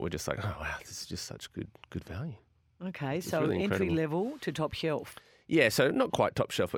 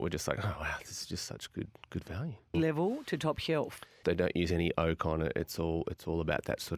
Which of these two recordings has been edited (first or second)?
second